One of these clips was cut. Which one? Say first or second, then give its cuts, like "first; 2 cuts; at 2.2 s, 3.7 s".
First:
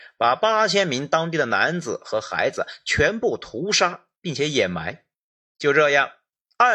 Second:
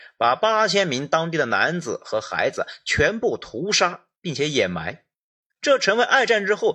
first; 1 cut; at 5.4 s